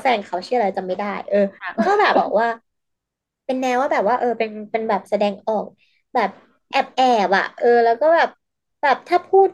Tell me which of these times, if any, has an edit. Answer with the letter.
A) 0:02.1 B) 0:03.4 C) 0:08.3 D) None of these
A